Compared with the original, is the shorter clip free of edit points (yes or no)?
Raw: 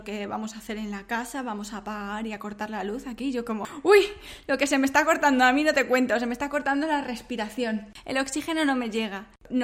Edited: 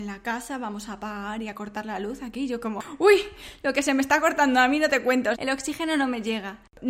no